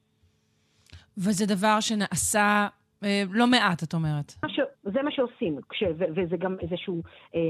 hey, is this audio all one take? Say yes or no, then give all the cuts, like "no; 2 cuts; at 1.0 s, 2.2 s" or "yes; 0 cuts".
no; 1 cut; at 4.4 s